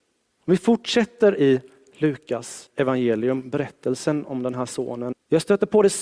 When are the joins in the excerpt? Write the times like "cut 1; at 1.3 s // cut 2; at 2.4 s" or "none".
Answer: cut 1; at 5.1 s